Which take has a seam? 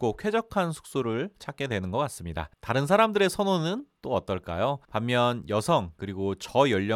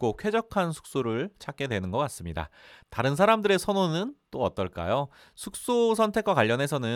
first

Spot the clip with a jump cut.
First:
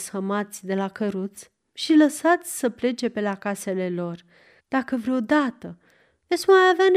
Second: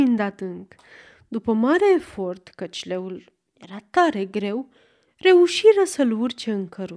first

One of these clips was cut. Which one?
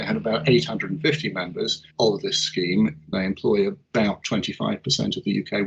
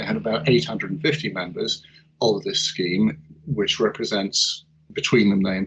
first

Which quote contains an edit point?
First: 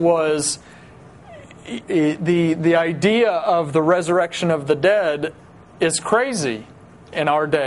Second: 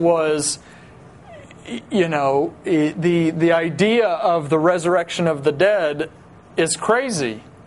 first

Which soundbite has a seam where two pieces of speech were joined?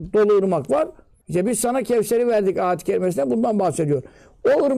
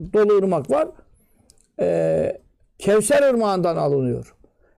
first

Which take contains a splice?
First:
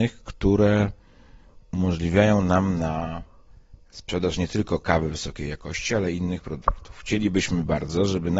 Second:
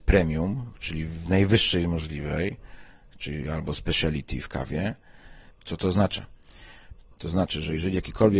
second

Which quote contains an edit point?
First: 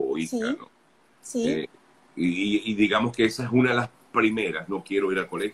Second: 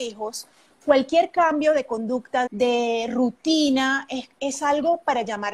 second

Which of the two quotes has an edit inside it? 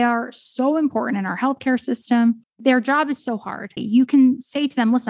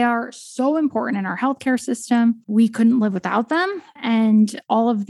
first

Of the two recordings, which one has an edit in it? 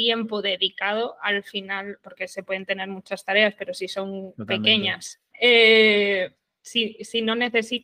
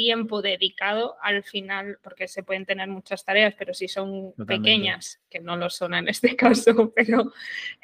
first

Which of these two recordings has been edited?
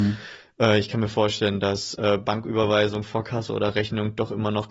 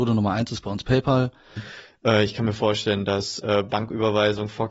second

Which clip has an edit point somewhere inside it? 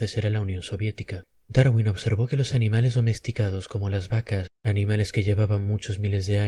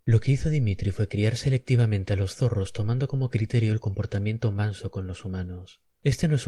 first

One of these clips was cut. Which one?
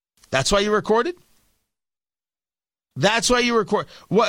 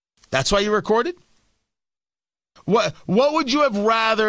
second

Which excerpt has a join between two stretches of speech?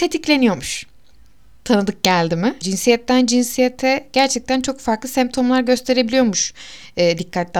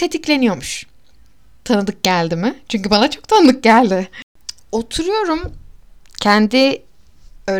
first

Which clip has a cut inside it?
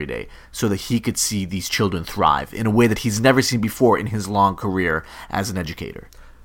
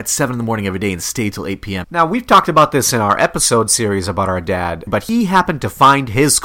second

